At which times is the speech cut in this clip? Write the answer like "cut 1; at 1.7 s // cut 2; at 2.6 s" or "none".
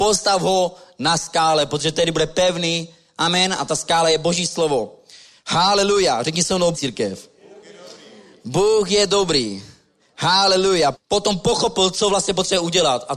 cut 1; at 6.7 s // cut 2; at 10.9 s